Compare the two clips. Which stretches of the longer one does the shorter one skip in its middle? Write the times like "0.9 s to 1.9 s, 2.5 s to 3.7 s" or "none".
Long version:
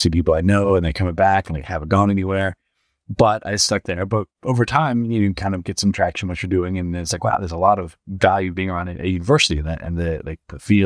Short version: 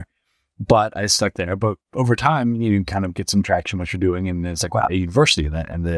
7.4 s to 9.0 s